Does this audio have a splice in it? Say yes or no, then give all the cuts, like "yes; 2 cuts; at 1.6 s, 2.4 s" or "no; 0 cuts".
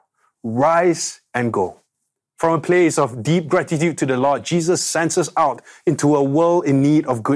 no; 0 cuts